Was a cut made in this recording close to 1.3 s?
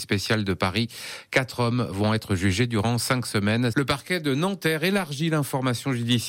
no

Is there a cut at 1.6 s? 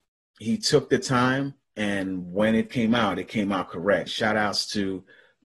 yes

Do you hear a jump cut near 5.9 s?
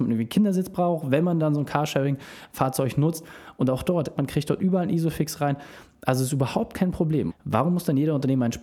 no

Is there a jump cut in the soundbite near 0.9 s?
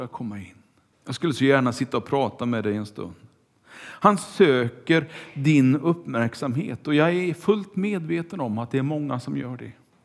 yes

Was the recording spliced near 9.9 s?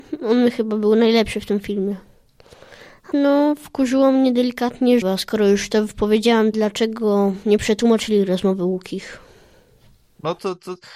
no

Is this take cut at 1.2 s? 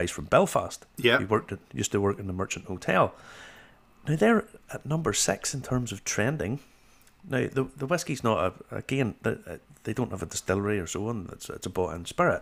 no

